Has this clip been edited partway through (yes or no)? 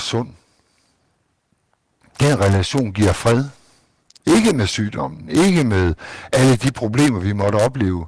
no